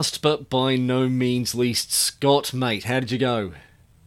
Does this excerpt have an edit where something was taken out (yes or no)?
no